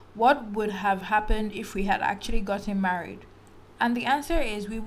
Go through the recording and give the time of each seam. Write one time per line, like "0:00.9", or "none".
none